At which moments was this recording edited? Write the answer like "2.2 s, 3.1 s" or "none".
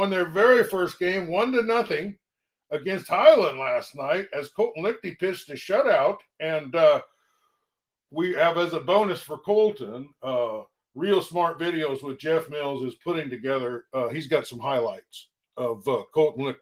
none